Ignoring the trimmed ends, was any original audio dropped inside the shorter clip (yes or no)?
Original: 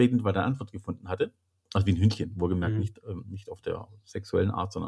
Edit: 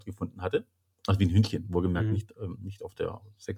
no